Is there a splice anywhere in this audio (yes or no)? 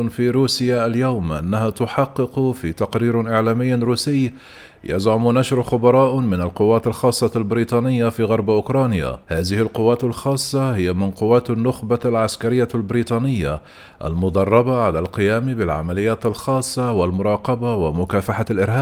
yes